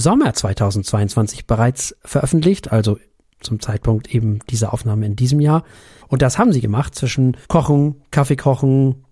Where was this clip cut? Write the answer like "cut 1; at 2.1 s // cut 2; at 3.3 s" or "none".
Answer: cut 1; at 6.0 s // cut 2; at 7.4 s